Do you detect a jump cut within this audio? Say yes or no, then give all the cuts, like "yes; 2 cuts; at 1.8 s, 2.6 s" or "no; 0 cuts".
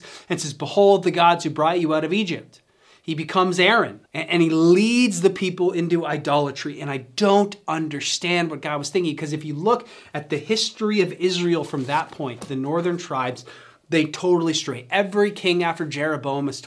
yes; 1 cut; at 4.1 s